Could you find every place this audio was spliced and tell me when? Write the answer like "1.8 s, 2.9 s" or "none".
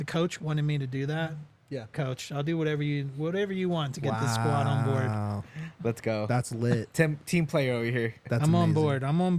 1.9 s, 8.2 s